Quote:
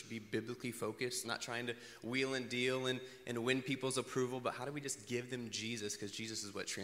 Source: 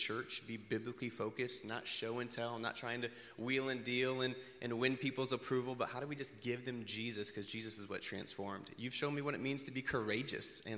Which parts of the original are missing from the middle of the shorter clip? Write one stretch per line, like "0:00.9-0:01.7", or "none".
0:01.6-0:02.6